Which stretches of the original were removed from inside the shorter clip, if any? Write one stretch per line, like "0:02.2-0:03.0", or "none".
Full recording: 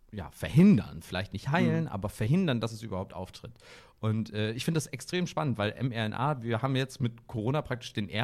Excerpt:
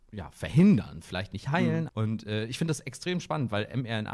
0:01.9-0:04.0